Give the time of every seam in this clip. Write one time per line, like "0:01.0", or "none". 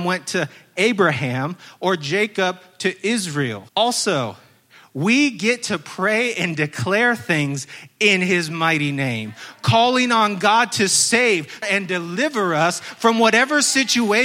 0:03.7
0:11.6